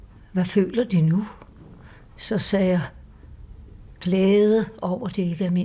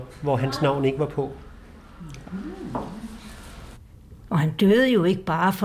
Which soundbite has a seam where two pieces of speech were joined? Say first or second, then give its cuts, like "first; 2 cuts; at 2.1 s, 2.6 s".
second; 1 cut; at 2.2 s